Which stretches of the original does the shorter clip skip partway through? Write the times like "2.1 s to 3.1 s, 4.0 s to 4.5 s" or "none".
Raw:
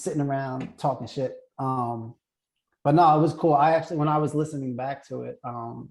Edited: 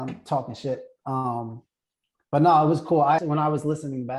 3.7 s to 3.9 s

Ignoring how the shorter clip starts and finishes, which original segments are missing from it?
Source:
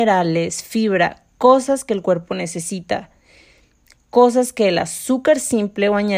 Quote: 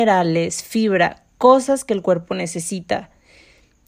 none

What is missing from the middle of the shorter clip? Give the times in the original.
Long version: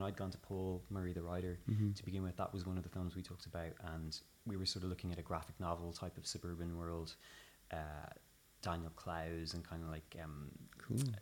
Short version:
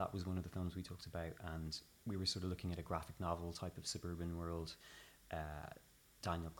none

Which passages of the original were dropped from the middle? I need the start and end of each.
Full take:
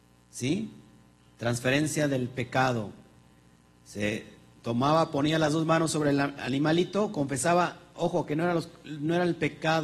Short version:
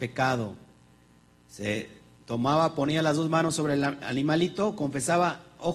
none

